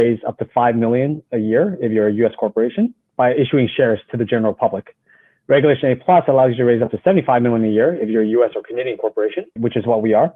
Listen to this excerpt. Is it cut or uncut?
uncut